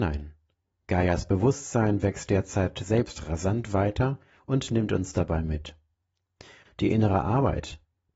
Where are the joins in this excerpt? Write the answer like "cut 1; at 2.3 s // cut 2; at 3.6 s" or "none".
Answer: cut 1; at 6.7 s